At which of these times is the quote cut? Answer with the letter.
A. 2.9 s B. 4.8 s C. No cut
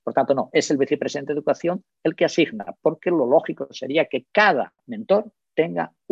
B